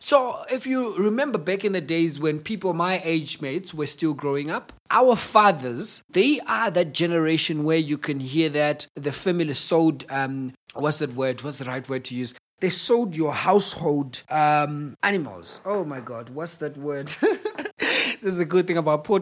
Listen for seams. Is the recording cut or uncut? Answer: cut